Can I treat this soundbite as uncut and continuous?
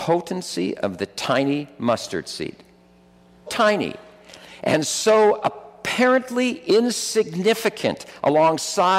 no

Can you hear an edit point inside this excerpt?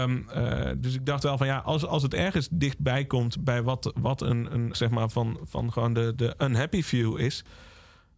yes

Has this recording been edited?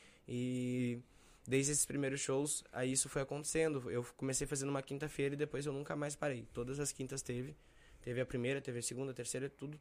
no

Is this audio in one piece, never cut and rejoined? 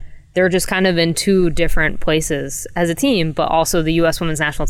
yes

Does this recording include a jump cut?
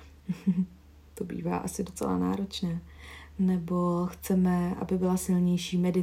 no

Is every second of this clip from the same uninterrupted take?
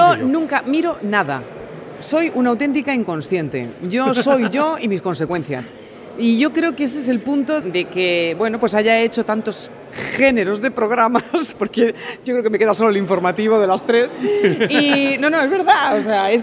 no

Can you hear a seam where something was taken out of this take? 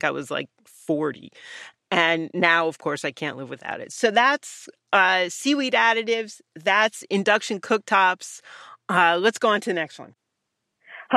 no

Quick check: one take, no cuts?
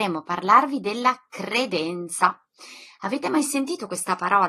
yes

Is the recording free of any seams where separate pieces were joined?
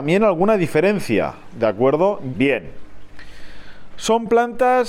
no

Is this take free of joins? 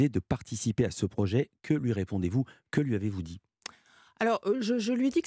yes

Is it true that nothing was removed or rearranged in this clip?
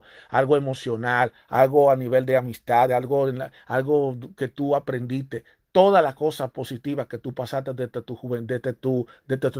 yes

